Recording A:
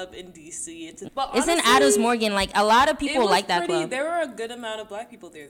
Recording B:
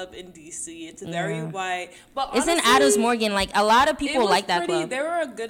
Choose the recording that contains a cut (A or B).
A